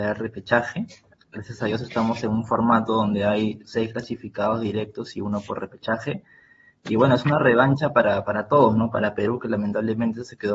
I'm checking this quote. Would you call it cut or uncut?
uncut